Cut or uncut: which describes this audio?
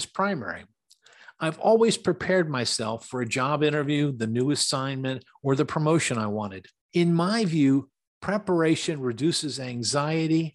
uncut